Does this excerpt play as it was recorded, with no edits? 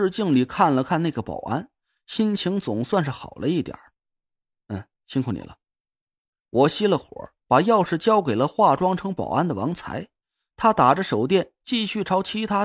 yes; 0 cuts

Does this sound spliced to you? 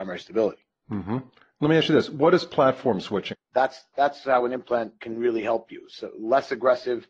yes; 1 cut; at 3.3 s

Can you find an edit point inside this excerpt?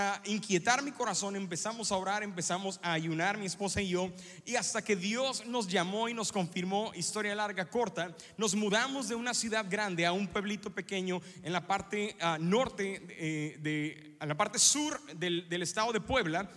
no; 0 cuts

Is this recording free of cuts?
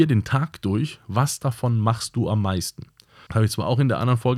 no; 1 cut; at 3.3 s

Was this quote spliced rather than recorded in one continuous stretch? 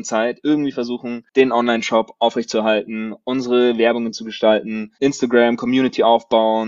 yes; 1 cut; at 1.3 s

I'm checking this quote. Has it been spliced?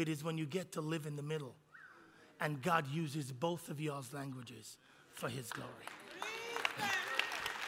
no; 0 cuts

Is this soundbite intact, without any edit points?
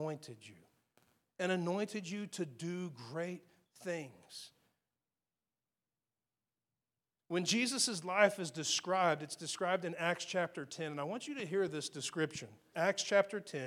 no; 1 cut; at 12.7 s

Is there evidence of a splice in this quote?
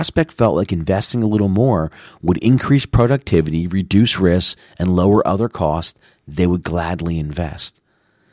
no; 0 cuts

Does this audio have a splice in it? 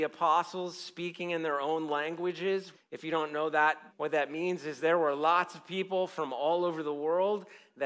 yes; 2 cuts; at 2.7 s, 3.9 s

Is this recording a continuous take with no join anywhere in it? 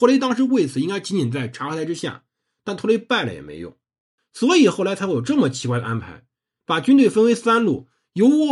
no; 1 cut; at 4.2 s

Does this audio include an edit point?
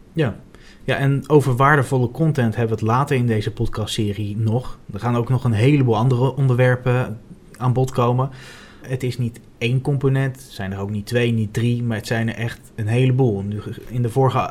yes; 1 cut; at 8.8 s

